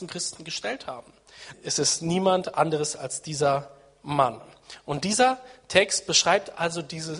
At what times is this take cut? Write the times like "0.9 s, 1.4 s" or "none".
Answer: 1.5 s